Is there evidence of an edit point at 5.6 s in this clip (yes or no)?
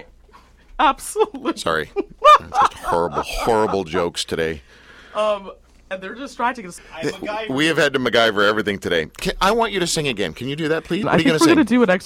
no